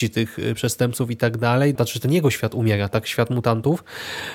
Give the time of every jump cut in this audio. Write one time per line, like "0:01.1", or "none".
0:01.8